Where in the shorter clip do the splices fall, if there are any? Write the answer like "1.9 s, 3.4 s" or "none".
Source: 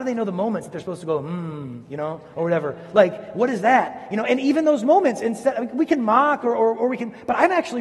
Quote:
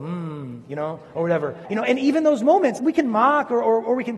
1.6 s, 2.8 s